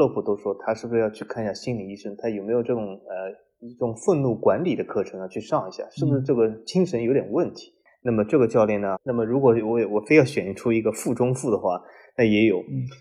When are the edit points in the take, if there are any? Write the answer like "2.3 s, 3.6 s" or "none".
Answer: 9.0 s